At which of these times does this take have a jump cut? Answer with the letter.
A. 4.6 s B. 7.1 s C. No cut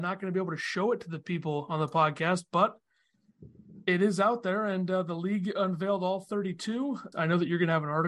B